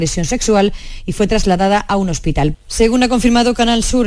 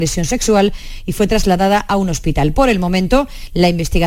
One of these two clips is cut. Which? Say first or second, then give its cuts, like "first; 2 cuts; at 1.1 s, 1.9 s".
first; 1 cut; at 2.5 s